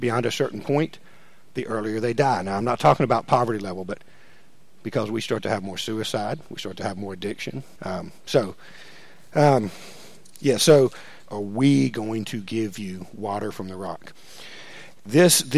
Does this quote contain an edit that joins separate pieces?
yes; 2 cuts; at 7.8 s, 11.2 s

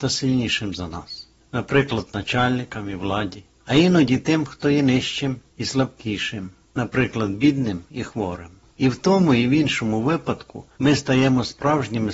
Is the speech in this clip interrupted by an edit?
no; 0 cuts

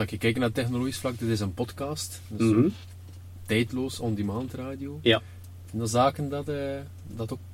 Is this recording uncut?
yes; 0 cuts

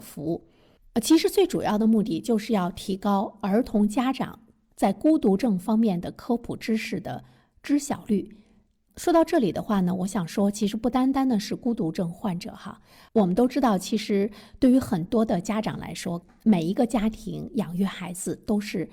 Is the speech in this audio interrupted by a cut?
no; 0 cuts

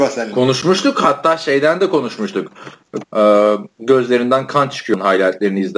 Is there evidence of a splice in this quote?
yes; 1 cut; at 3.0 s

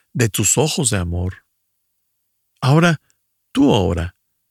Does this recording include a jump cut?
no; 0 cuts

